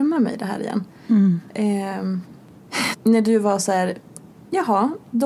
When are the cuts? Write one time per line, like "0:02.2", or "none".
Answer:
0:02.9